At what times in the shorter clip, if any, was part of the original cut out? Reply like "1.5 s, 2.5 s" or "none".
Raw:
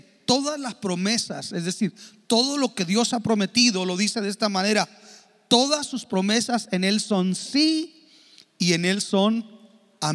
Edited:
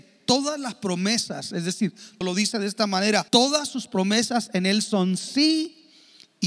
2.2 s, 3.3 s